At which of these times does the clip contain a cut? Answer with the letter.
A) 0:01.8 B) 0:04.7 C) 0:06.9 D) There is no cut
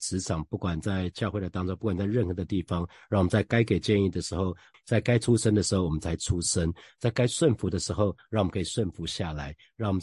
B